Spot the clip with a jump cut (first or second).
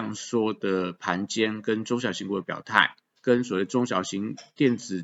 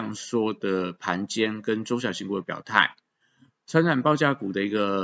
first